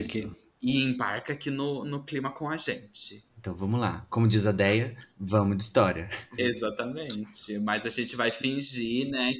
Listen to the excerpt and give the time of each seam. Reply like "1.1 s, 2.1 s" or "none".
3.3 s, 6.4 s